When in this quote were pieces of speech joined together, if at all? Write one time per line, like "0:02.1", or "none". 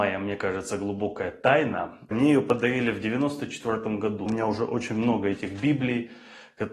0:02.1
0:04.3